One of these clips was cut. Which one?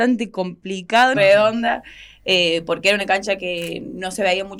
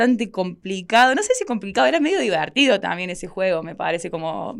first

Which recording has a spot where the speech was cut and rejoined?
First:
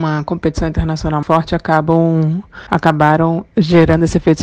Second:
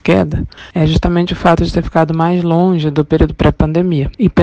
first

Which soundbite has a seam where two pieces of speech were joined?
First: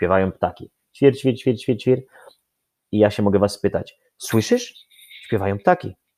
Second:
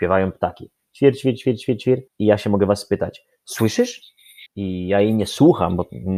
second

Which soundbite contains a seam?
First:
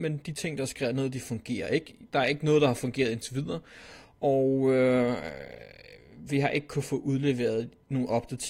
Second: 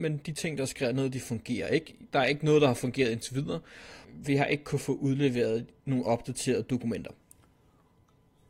second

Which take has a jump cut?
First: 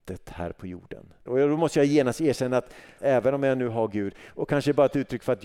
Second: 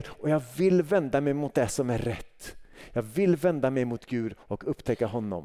first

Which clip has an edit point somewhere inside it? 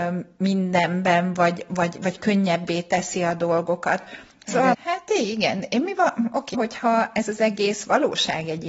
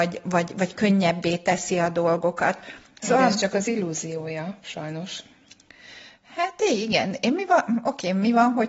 first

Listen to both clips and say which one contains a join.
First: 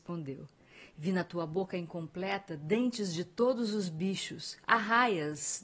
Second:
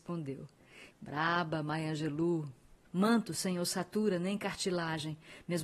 second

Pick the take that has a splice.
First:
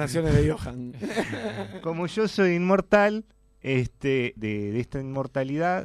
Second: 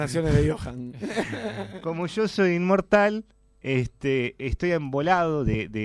first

